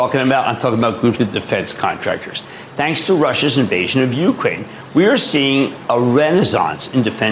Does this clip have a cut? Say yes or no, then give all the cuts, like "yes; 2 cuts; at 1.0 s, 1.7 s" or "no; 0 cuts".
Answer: yes; 1 cut; at 1.1 s